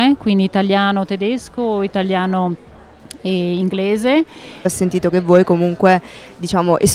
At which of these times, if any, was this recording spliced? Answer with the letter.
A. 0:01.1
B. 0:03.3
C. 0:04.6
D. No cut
C